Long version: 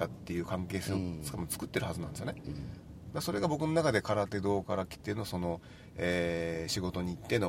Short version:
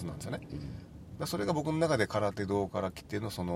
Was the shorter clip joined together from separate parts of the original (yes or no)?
no